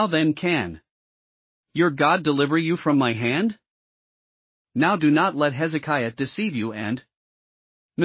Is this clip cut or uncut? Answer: uncut